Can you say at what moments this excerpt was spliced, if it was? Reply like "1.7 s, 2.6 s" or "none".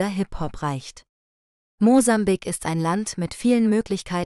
none